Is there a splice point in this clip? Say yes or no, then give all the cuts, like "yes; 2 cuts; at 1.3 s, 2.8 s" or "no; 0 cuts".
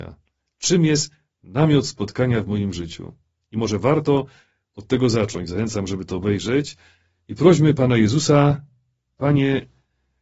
no; 0 cuts